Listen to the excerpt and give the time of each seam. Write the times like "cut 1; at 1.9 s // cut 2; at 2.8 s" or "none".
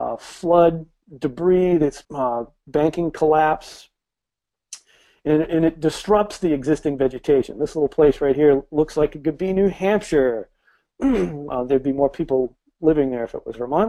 cut 1; at 2.0 s